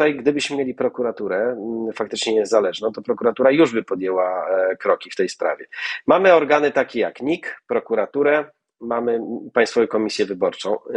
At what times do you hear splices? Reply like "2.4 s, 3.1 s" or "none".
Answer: none